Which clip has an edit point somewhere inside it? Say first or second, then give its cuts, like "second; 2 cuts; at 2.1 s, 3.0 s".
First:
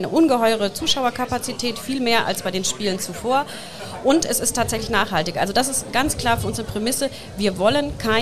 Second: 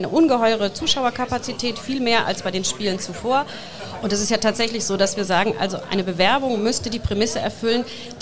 second; 1 cut; at 4.0 s